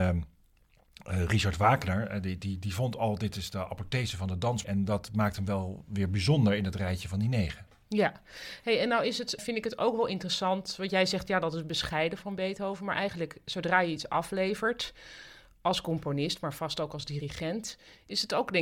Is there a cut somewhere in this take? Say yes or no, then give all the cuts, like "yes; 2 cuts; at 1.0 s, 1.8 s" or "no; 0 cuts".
yes; 2 cuts; at 4.6 s, 9.4 s